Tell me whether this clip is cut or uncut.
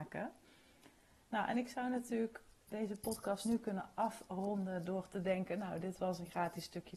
uncut